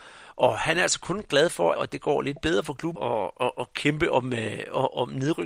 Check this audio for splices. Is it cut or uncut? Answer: cut